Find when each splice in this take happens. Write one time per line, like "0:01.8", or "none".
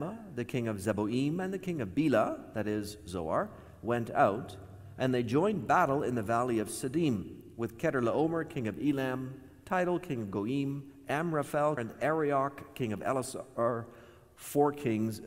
0:11.8